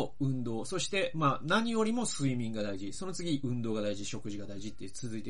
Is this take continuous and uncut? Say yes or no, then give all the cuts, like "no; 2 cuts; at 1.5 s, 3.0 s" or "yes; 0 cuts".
yes; 0 cuts